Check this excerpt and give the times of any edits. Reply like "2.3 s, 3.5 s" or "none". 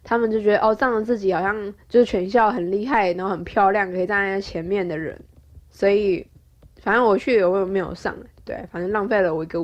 none